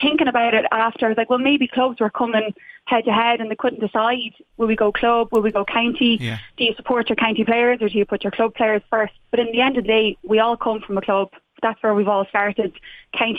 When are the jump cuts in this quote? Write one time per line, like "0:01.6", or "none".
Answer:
0:09.2